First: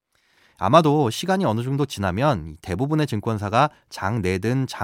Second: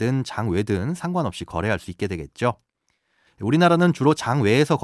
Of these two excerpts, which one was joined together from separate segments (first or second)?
second